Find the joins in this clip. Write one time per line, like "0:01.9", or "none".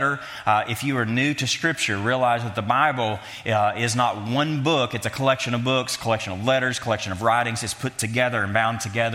none

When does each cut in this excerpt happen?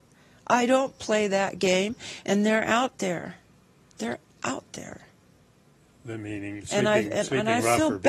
0:02.2

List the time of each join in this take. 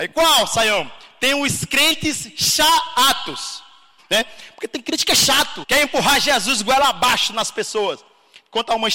0:04.0
0:05.6

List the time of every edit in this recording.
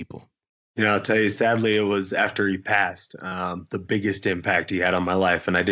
none

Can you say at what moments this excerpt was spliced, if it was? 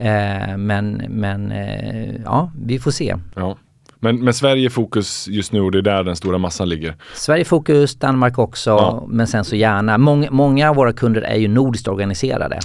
none

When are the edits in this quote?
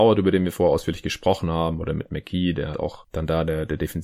0:02.7

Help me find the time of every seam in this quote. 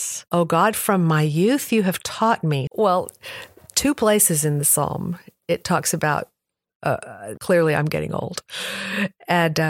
0:02.7
0:07.4

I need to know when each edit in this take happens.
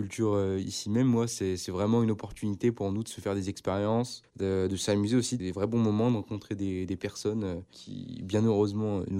0:05.4

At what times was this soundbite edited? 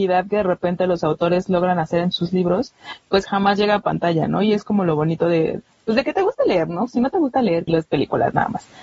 0:07.7

